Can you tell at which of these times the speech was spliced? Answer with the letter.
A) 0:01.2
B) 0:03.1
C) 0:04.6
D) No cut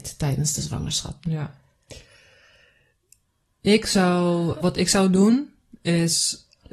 C